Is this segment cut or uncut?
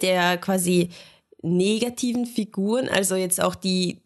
uncut